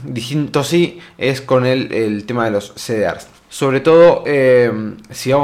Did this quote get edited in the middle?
yes; 1 cut; at 3.5 s

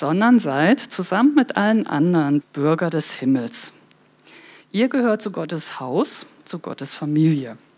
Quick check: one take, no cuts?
no; 1 cut; at 2.4 s

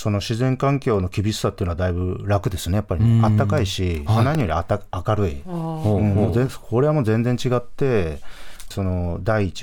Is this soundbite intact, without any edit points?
no; 1 cut; at 8.7 s

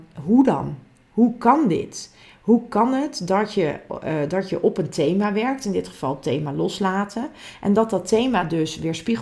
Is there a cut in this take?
no; 0 cuts

